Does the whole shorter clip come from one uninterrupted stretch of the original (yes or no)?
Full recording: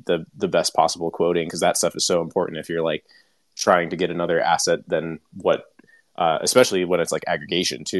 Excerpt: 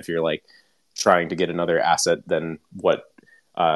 yes